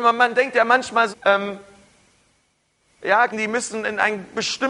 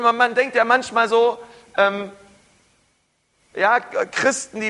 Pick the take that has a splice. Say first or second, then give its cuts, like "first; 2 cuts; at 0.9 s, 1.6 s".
first; 2 cuts; at 1.1 s, 3.3 s